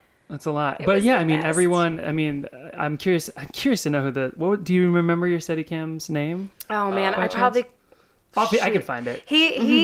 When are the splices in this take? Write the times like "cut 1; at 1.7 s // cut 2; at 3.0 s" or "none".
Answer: none